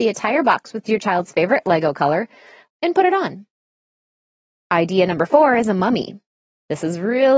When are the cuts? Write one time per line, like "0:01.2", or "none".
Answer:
0:02.7